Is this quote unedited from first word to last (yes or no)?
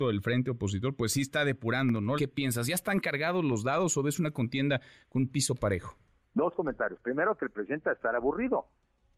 no